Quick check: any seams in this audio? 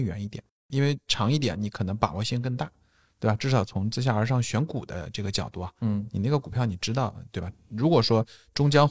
no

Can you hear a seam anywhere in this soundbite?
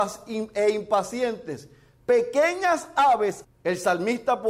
yes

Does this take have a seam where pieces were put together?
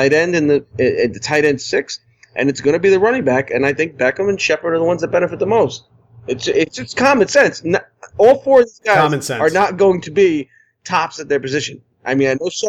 no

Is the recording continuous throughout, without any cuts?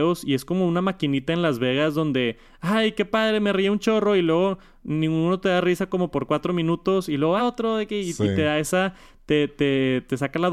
no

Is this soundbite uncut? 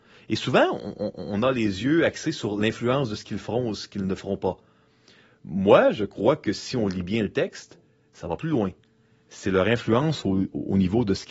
yes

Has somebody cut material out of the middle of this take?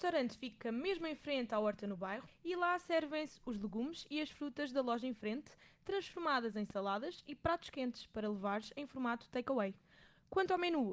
yes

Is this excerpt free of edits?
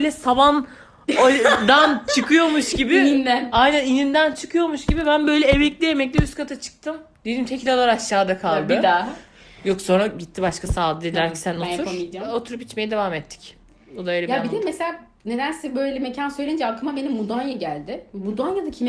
yes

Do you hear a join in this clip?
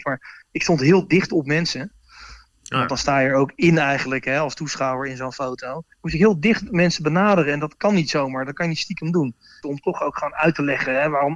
yes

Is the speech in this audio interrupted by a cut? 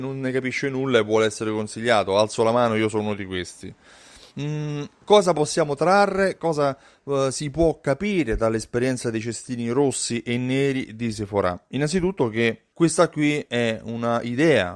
yes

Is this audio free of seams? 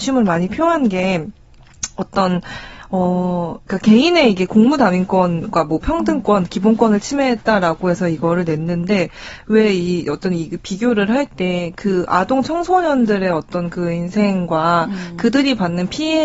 yes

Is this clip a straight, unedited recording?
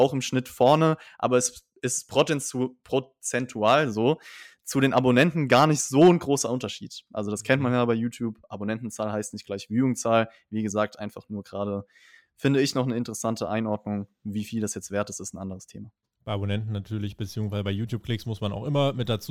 yes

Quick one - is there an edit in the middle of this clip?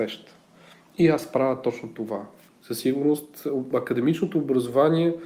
yes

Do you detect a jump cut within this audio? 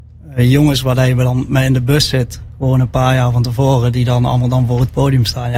no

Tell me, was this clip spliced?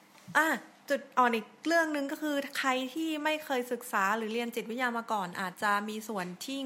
yes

